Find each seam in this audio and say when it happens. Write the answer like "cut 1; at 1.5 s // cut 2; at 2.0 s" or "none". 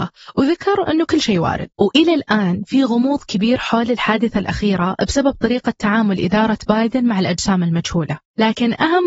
cut 1; at 1.7 s